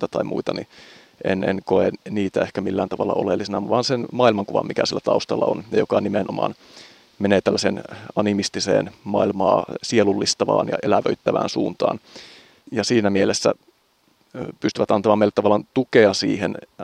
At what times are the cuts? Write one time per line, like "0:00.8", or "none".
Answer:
0:12.6